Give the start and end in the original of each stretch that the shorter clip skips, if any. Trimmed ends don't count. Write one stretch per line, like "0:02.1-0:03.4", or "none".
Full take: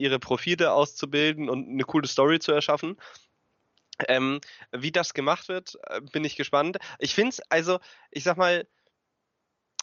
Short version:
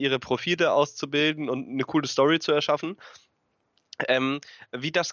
none